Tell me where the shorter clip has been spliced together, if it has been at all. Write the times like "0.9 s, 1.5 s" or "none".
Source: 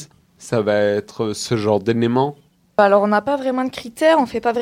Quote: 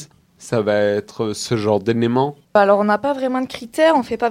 2.4 s